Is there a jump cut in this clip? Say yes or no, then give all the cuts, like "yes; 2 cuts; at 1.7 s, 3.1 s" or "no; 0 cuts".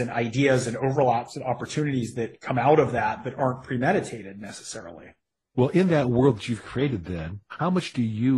no; 0 cuts